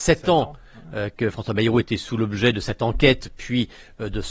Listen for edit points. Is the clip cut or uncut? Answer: uncut